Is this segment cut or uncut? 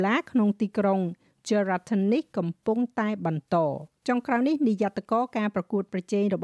cut